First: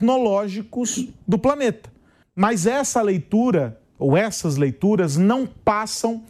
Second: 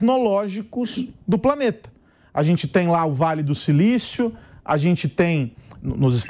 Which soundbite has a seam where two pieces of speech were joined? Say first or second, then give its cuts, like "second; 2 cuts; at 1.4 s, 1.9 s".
first; 1 cut; at 2.2 s